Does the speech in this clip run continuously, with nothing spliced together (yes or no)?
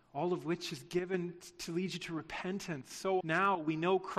no